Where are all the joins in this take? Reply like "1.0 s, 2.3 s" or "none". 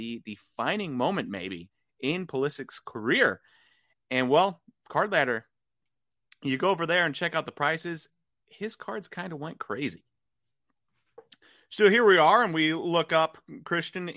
none